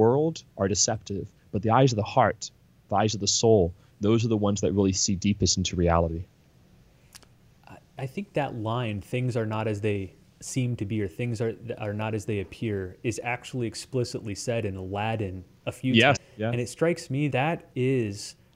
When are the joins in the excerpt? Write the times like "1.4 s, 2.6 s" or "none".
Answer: 16.2 s, 17.3 s